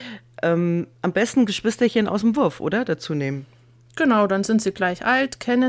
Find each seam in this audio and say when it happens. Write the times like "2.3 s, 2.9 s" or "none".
1.0 s